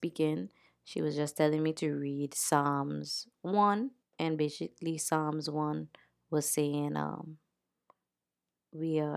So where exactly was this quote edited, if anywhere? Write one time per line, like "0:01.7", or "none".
none